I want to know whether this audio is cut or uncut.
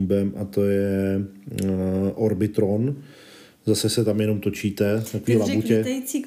uncut